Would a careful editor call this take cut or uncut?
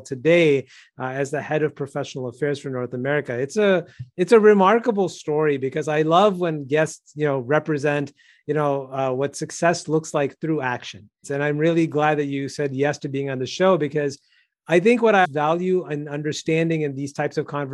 cut